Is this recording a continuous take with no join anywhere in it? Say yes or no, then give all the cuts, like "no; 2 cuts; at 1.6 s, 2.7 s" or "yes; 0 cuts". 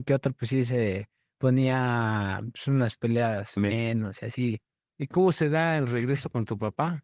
yes; 0 cuts